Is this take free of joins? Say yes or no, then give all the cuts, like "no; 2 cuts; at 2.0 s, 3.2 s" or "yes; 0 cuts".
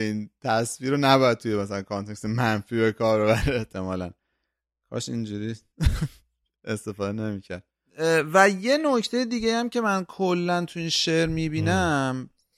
yes; 0 cuts